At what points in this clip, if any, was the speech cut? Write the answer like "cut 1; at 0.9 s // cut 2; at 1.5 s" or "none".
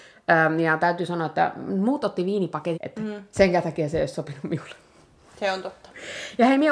cut 1; at 2.7 s